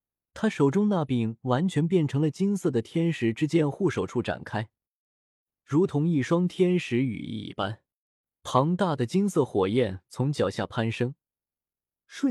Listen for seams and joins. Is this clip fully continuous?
yes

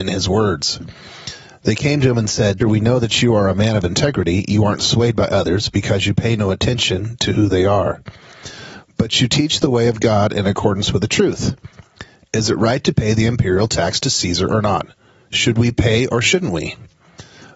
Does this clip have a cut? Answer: yes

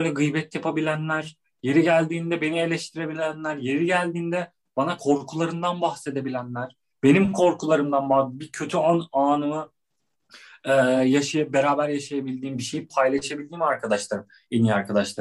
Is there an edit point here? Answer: no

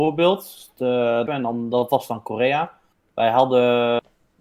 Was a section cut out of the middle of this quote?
yes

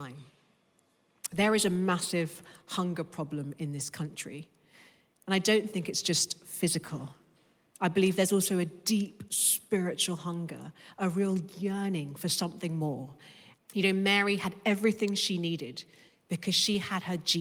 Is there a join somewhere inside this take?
yes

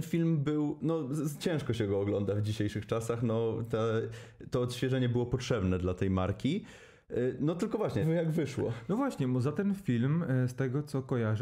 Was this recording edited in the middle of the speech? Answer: yes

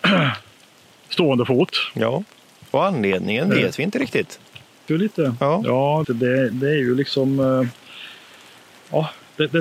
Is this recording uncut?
no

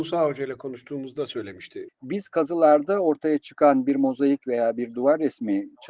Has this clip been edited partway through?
yes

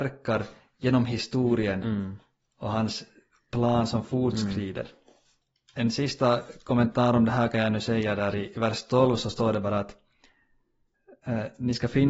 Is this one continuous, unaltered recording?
yes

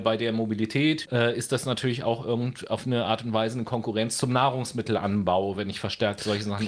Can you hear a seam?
yes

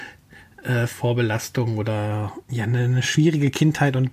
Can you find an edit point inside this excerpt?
yes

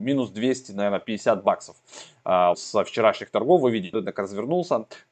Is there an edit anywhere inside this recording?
yes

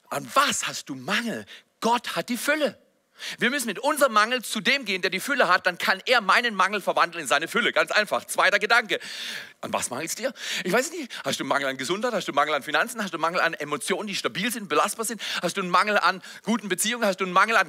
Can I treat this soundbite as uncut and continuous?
no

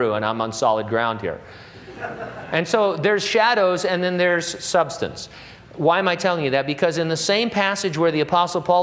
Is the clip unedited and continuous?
yes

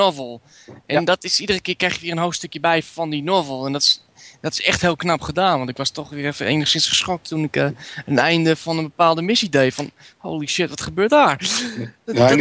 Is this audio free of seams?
yes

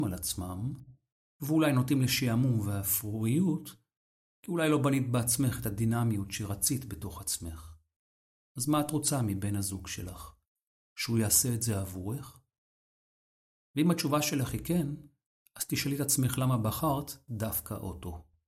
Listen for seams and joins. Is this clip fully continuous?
yes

